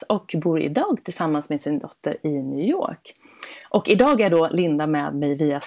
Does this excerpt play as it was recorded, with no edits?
yes; 0 cuts

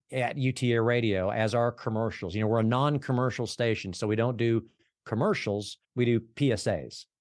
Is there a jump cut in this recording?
yes; 1 cut; at 5.8 s

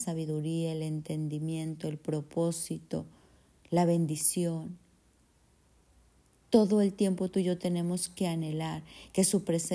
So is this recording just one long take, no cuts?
yes; 0 cuts

